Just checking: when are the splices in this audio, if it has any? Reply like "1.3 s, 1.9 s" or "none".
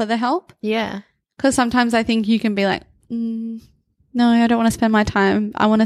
none